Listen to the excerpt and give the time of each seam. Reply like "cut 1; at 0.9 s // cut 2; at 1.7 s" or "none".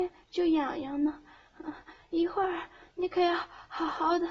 none